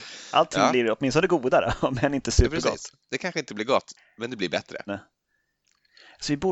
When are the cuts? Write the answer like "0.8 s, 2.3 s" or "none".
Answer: 3.0 s, 4.9 s